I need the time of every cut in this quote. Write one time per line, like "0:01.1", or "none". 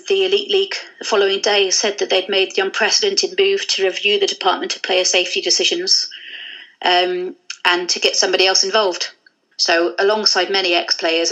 0:09.5

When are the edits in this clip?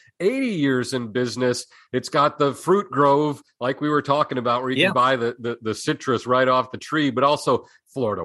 none

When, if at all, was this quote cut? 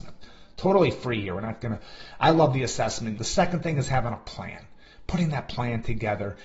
0:03.2

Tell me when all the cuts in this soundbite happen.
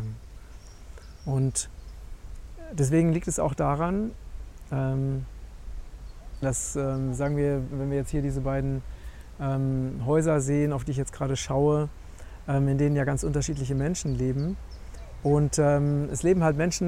0:06.4

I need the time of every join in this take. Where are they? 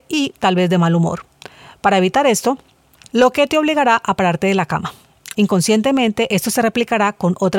0:03.1
0:05.3

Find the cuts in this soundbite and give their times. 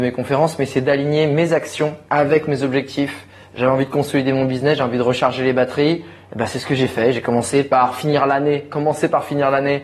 0:02.1

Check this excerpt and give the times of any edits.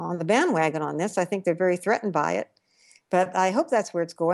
none

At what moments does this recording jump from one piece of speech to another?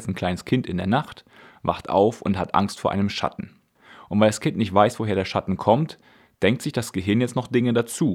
none

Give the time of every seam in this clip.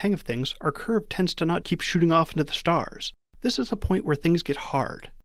0:01.6
0:03.3

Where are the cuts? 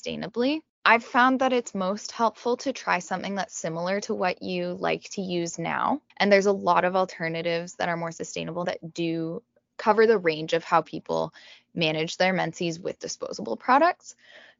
0:06.1
0:08.6

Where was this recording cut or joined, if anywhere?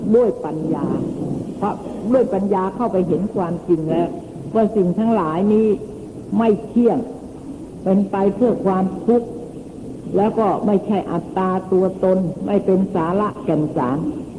none

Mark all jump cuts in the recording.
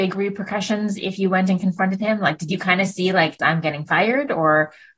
0:03.4

